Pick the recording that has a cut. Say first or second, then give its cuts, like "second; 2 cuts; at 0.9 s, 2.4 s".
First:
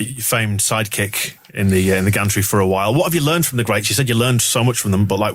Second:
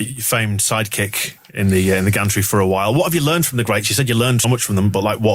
second; 1 cut; at 4.4 s